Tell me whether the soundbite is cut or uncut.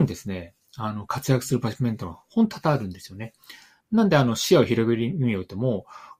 uncut